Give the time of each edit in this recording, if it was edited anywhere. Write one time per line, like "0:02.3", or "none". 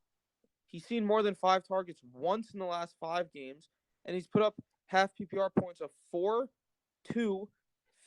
none